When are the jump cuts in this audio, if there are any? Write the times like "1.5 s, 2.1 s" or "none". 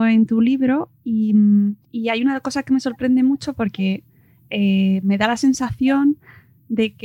1.8 s